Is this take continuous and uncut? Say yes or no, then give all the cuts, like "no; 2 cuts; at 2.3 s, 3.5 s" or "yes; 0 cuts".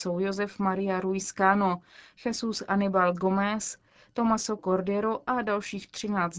no; 2 cuts; at 3.1 s, 4.6 s